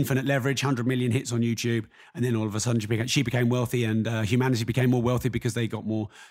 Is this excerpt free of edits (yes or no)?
yes